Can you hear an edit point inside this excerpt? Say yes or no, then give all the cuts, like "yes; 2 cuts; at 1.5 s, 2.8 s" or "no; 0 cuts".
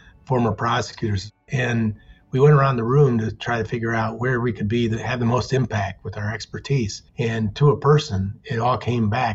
yes; 1 cut; at 7.1 s